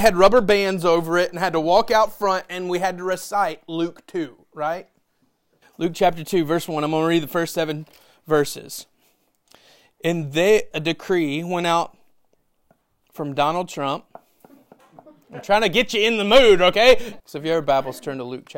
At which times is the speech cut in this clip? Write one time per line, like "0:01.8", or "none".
0:05.6
0:10.7
0:17.2